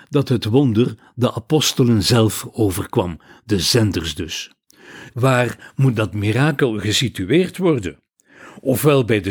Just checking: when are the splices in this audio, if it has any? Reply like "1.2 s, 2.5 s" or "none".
5.1 s